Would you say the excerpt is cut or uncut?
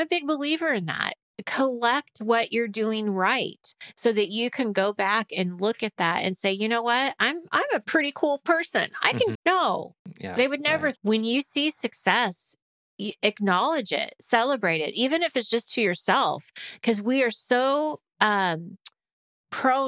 cut